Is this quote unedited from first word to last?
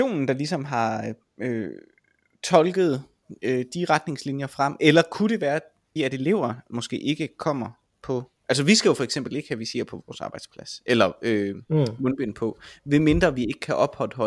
no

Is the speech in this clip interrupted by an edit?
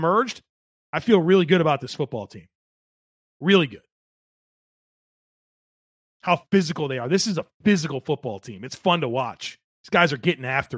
no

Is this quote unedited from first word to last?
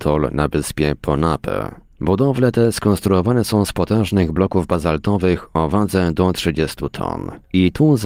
yes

